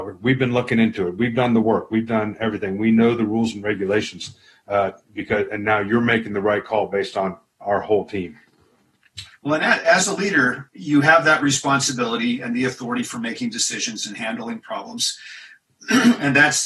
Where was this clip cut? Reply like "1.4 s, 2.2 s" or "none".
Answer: none